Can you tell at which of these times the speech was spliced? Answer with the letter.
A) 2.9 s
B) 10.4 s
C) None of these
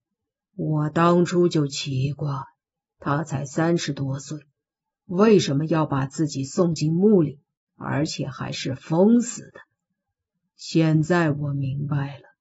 C